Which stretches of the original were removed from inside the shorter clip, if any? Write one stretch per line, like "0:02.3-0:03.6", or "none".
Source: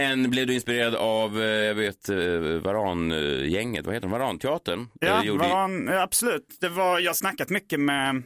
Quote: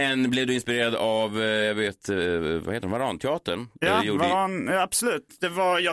0:02.6-0:03.8